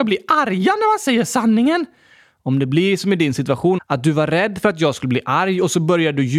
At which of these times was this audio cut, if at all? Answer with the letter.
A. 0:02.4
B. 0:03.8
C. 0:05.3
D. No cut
B